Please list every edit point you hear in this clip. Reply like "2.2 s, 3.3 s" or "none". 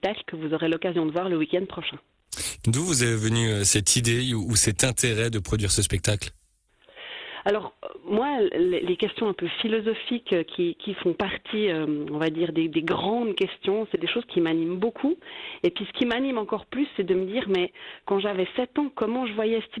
2.6 s